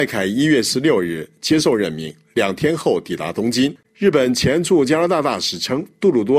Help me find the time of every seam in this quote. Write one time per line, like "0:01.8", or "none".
0:03.8